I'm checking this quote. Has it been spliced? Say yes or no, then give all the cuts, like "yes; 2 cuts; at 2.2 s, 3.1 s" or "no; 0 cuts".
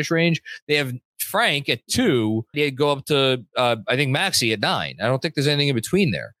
yes; 1 cut; at 2.5 s